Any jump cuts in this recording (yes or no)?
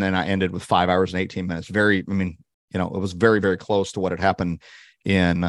no